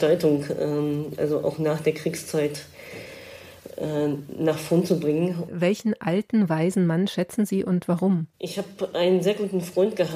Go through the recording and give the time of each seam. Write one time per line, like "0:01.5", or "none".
0:05.5
0:08.3